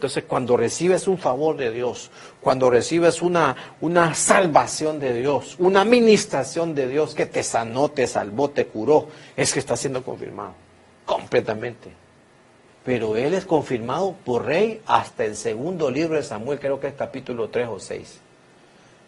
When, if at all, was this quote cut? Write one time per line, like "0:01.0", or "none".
0:05.6
0:12.7

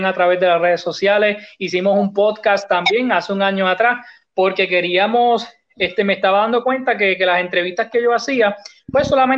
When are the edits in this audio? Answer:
none

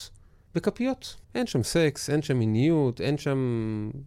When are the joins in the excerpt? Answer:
0:01.2

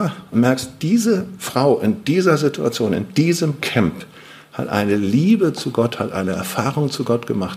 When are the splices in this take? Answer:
none

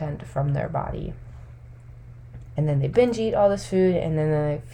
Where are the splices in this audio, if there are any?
0:02.6

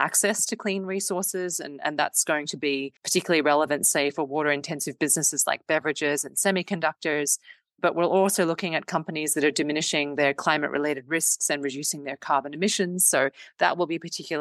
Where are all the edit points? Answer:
0:03.0

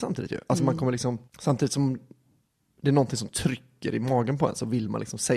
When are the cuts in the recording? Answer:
0:01.3

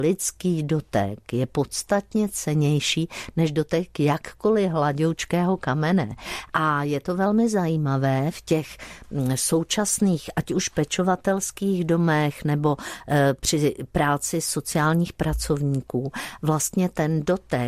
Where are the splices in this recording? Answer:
none

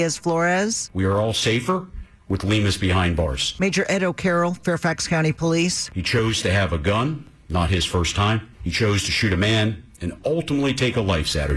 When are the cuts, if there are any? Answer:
0:08.5

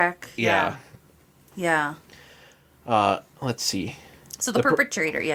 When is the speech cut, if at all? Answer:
0:01.5

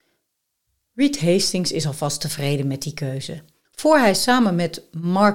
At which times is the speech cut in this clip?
0:03.7

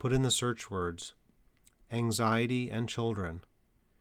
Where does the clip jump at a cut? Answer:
0:01.8

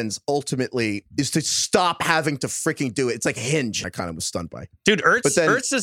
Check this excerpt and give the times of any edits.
0:03.8

